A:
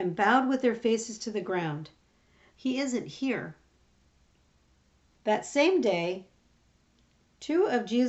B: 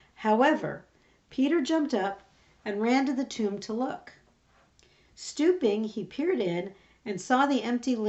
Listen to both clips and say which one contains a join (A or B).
A